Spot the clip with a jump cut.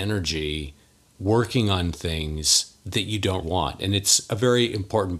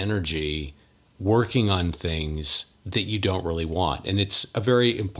first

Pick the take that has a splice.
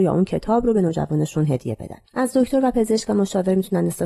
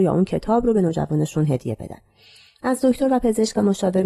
first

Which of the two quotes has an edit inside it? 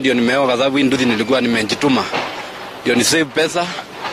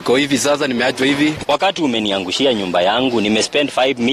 second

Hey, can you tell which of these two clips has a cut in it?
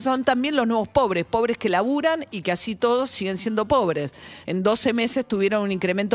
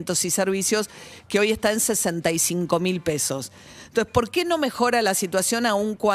first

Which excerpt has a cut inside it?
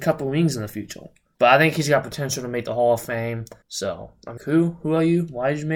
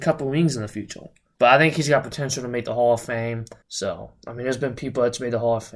first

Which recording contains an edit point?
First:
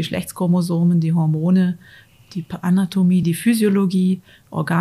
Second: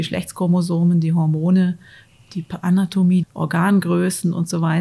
second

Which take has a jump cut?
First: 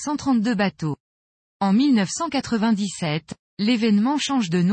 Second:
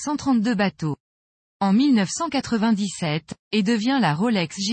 second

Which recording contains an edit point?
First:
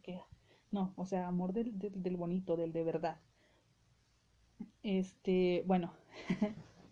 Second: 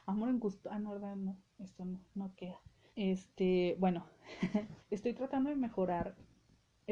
second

